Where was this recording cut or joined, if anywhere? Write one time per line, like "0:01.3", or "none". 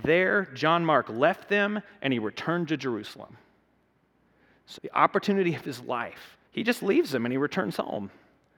0:04.8
0:06.5